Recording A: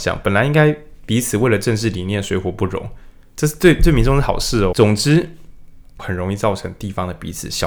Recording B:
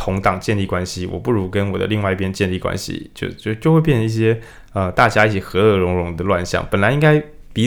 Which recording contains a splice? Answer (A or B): A